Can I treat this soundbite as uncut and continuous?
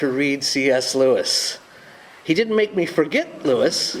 yes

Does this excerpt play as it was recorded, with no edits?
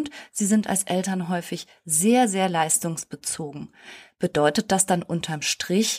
yes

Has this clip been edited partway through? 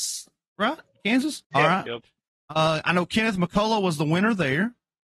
yes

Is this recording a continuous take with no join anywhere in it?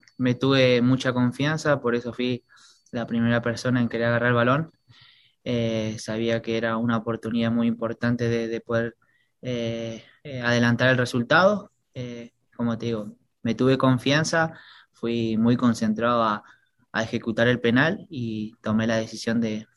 yes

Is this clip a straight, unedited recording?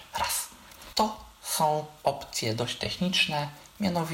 no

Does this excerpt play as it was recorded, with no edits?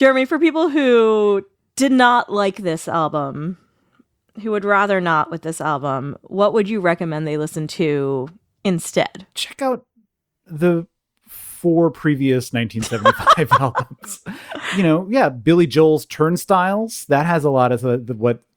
no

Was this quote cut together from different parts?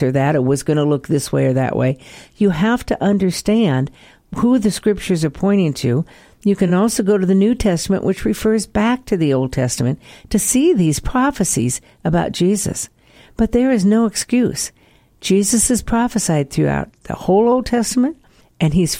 no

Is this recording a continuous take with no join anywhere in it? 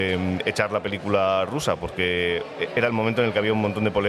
yes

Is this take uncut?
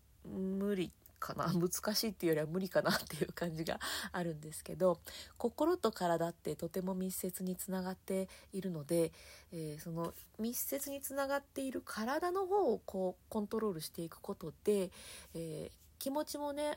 yes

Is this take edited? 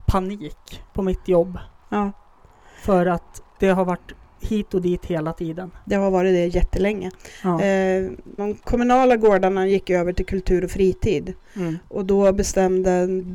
yes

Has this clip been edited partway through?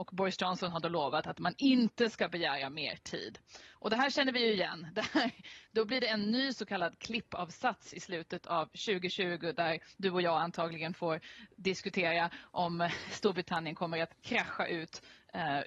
no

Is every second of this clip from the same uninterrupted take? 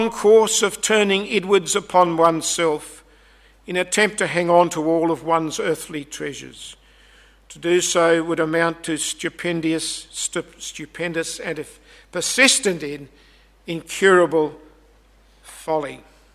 yes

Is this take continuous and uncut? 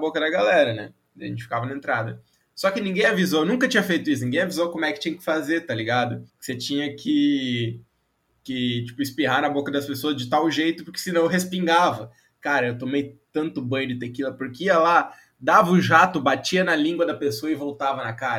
no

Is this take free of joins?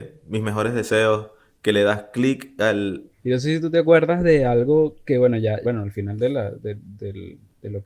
no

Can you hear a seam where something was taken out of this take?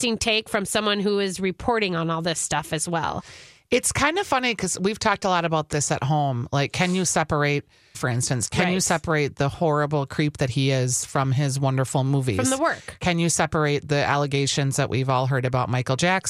yes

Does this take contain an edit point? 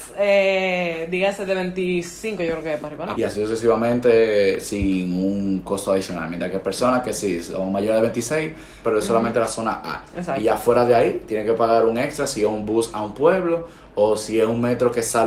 yes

